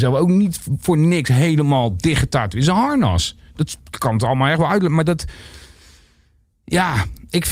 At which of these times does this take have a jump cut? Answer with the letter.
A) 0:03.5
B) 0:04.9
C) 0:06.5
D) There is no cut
D